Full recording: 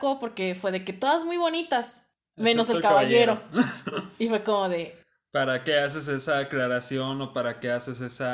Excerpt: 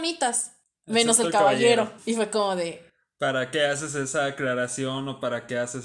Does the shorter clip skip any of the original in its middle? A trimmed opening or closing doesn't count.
yes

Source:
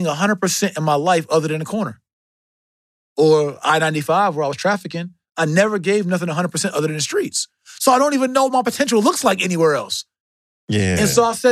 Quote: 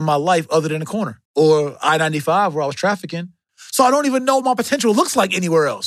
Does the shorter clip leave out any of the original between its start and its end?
yes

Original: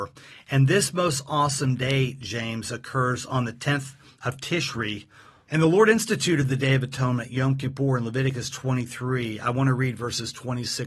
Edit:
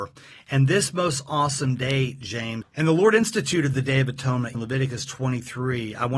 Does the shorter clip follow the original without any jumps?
no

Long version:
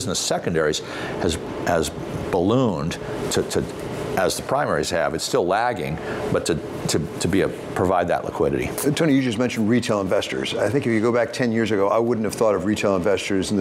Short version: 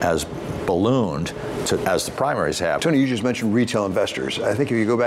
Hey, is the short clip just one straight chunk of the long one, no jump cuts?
no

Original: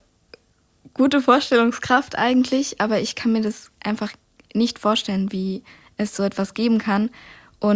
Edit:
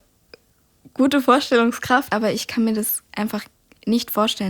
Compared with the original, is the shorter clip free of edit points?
no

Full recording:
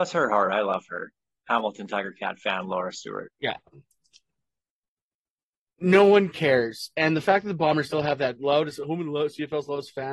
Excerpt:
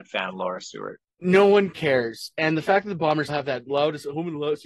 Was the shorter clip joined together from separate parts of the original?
yes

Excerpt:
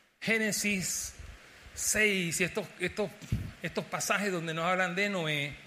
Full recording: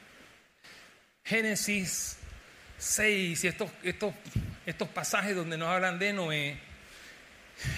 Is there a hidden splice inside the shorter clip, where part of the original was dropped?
no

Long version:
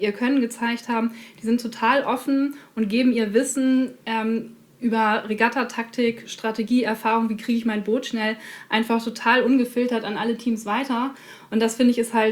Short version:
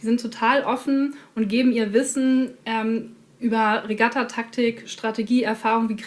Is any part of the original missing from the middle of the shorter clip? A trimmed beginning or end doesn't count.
no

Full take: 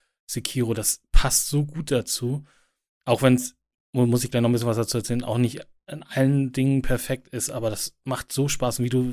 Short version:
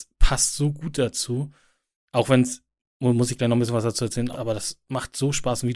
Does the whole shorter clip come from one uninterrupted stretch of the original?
no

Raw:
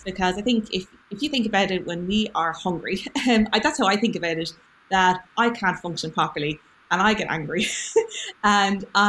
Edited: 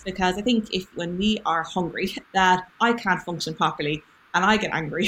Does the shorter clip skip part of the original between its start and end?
yes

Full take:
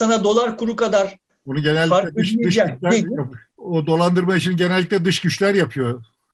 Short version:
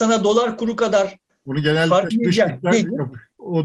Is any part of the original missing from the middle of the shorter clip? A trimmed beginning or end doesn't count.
yes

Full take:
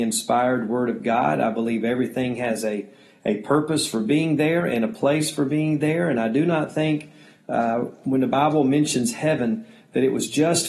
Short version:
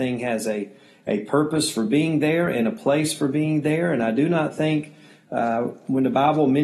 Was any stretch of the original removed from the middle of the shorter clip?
no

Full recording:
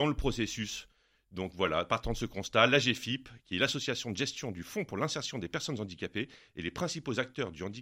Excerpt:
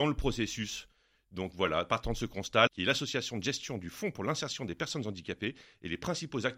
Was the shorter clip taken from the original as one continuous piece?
no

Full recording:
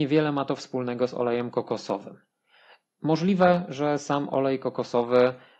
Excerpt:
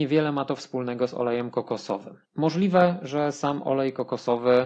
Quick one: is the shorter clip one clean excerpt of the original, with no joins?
no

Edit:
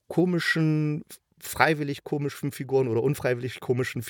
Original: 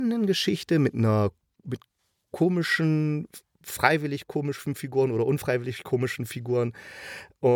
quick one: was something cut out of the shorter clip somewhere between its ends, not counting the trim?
no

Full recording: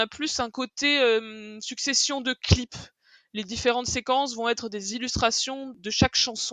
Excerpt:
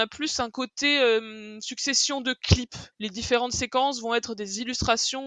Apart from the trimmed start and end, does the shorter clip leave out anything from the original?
yes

